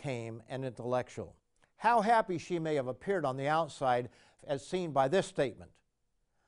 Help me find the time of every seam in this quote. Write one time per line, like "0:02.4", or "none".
0:01.6
0:04.4

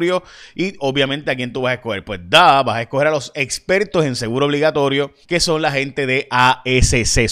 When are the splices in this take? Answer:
0:05.2

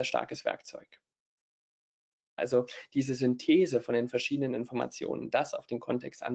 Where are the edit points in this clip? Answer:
0:02.4

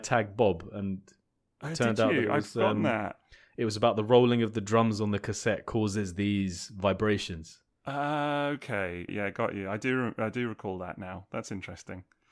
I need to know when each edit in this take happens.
0:09.1

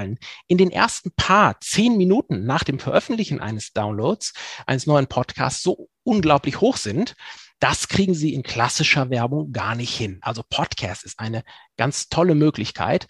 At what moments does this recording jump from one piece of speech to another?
none

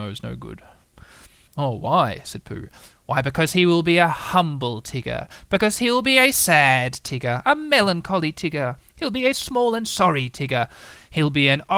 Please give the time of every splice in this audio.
0:01.5

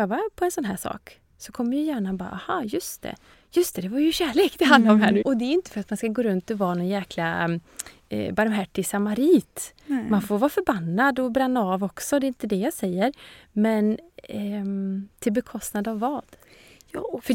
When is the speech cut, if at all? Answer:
0:03.3
0:05.2

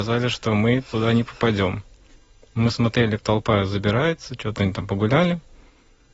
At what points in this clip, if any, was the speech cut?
0:03.2

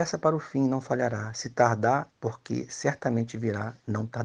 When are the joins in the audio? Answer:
0:02.1

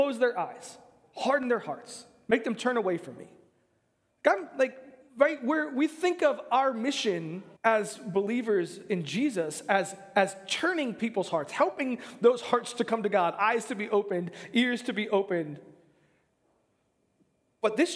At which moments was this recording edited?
0:04.1
0:07.6

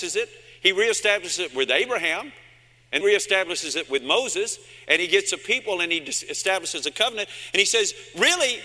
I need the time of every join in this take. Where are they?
0:03.0

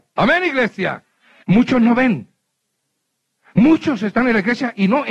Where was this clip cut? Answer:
0:01.4

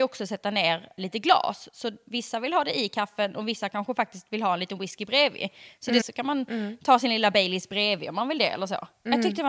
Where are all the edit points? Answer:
0:01.0
0:06.0

